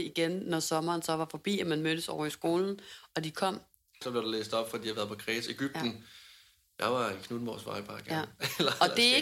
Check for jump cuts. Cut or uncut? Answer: cut